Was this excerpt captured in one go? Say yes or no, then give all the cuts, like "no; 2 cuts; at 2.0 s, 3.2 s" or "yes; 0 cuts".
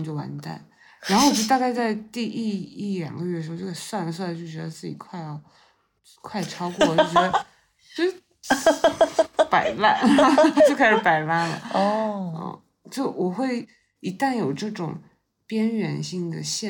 yes; 0 cuts